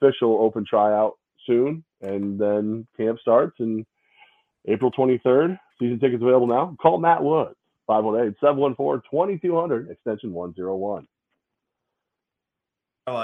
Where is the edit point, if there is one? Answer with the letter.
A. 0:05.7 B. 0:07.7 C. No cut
A